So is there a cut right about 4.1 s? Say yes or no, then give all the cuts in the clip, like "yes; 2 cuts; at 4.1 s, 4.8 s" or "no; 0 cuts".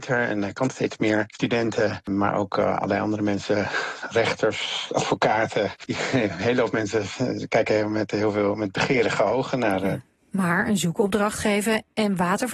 no; 0 cuts